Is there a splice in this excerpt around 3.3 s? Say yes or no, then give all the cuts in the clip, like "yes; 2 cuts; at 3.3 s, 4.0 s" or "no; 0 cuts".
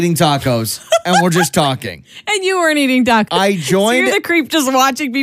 yes; 1 cut; at 3.3 s